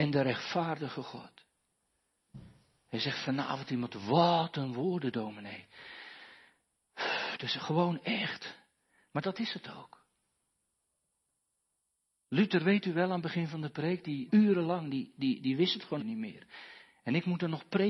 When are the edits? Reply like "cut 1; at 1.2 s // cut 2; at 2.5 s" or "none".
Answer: cut 1; at 14.3 s // cut 2; at 16.0 s